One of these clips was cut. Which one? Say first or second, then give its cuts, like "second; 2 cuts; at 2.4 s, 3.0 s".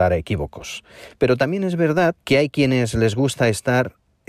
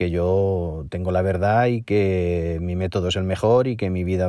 first; 2 cuts; at 1.1 s, 2.2 s